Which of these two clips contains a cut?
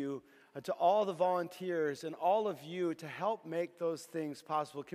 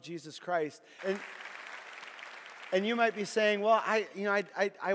second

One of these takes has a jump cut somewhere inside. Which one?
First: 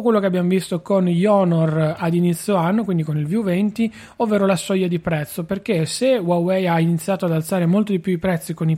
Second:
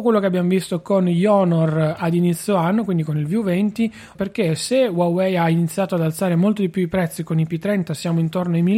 second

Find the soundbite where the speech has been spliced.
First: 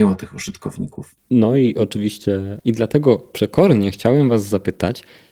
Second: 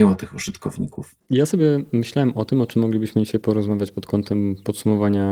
first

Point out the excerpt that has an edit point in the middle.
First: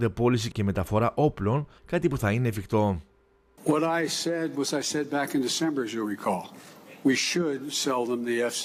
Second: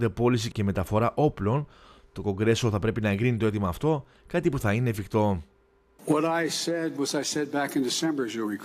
first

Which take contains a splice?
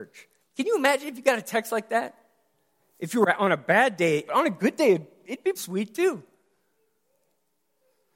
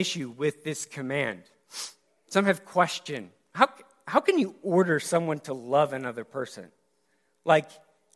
first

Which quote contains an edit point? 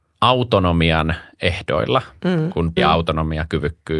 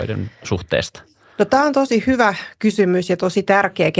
first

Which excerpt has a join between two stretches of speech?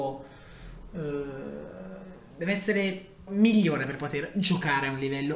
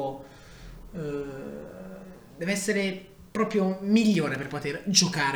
first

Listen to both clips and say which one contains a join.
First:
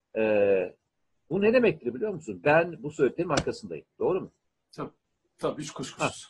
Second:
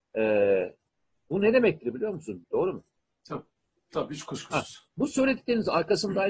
second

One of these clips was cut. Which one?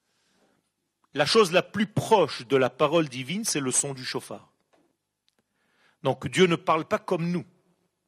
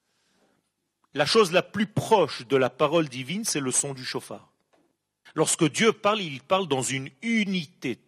second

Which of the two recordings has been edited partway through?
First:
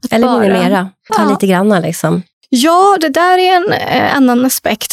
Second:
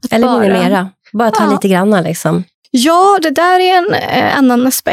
first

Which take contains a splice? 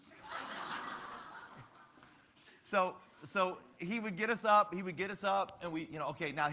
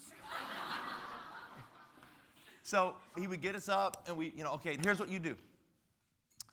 second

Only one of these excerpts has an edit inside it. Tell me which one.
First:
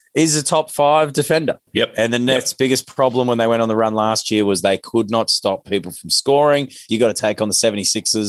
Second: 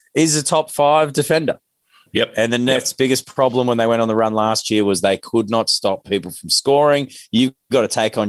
first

